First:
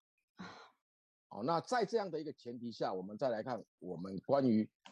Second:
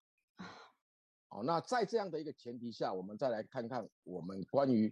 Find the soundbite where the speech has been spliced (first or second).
first